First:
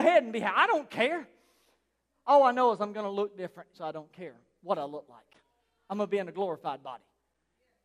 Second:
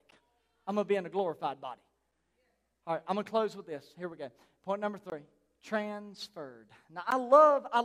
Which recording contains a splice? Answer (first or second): first